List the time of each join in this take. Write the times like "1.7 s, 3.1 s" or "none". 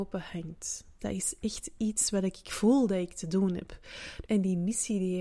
1.0 s, 4.3 s